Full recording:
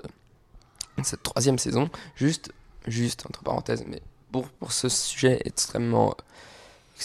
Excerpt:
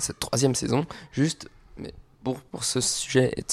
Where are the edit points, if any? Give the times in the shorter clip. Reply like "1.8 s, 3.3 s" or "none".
1.8 s